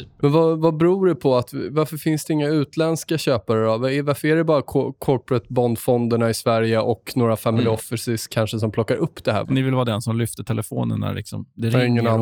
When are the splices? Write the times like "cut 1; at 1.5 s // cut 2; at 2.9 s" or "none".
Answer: cut 1; at 9.4 s